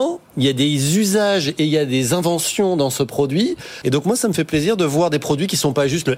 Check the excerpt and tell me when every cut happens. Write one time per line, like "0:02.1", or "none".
0:03.8